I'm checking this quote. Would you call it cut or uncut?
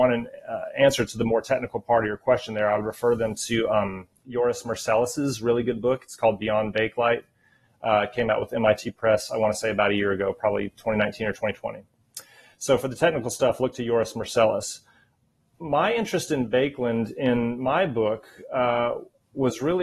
uncut